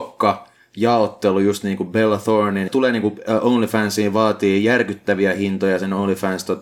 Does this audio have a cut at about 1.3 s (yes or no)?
no